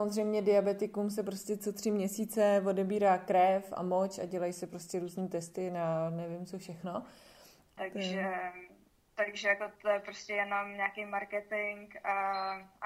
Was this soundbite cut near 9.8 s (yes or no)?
yes